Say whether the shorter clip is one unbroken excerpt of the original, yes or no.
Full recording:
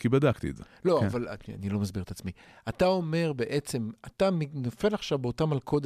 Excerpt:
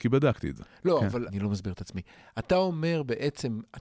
no